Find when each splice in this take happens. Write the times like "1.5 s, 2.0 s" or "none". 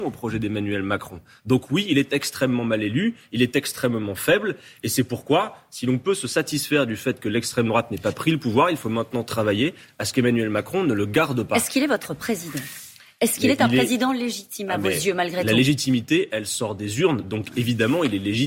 none